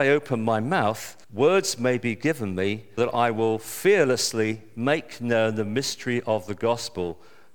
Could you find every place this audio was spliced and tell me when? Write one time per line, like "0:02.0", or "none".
0:01.2
0:03.0